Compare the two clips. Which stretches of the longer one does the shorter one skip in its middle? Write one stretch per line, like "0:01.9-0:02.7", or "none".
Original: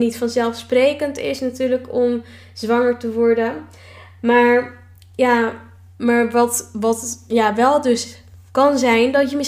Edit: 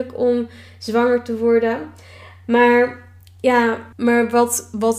0:05.7-0:05.9